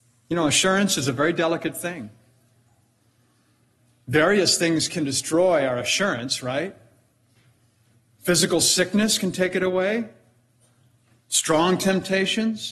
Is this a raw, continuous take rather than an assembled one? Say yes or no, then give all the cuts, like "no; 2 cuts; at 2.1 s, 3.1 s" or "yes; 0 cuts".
yes; 0 cuts